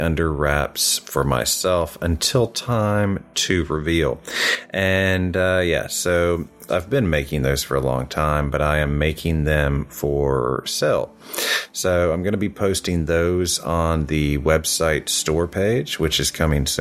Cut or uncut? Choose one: cut